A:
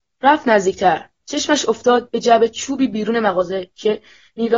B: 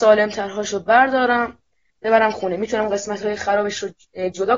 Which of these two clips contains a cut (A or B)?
B